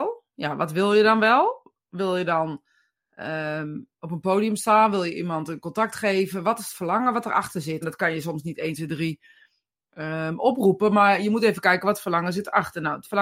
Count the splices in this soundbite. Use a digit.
1